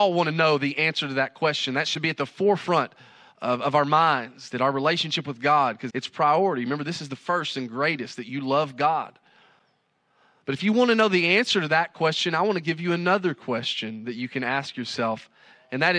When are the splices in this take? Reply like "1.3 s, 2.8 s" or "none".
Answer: 5.9 s